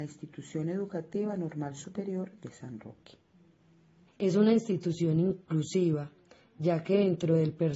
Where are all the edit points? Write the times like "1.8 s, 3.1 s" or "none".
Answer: 4.1 s